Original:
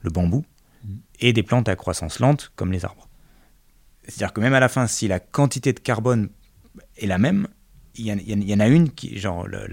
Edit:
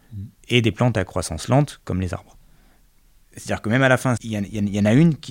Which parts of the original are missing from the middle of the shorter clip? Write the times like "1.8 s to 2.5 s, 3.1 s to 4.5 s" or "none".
4.9 s to 7.9 s